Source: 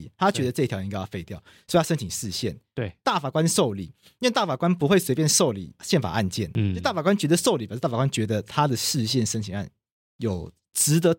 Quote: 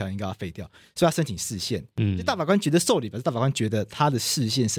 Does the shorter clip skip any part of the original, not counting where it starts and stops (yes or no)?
yes